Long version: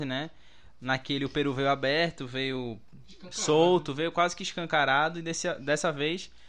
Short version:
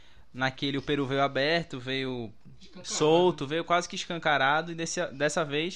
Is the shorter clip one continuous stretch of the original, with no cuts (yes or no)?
yes